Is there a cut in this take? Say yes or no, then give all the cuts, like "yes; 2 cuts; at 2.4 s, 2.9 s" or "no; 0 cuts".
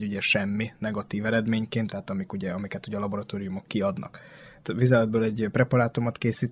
yes; 1 cut; at 1.9 s